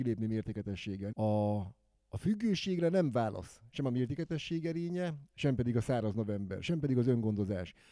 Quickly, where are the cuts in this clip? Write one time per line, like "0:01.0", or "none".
0:01.1